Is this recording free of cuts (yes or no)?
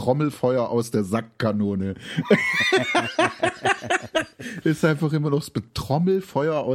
no